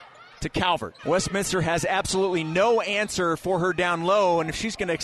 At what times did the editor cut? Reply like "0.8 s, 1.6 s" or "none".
1.0 s

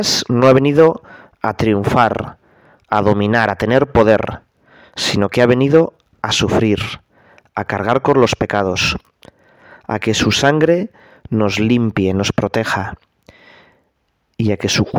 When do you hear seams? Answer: none

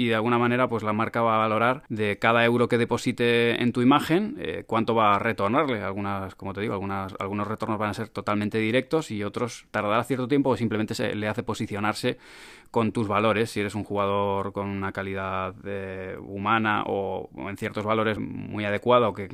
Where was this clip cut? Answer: 1.9 s, 18.2 s

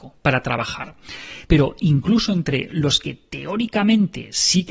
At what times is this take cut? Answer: 1.5 s

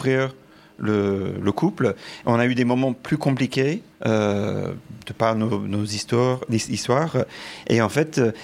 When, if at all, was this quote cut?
2.2 s, 3.9 s

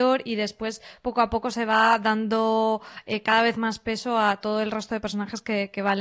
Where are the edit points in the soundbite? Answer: none

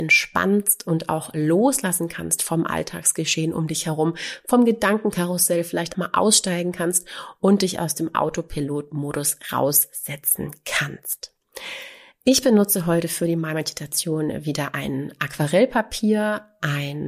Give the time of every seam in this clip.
5.9 s

